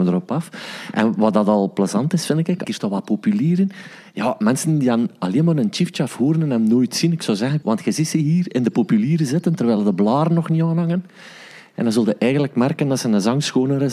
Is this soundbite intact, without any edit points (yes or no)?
no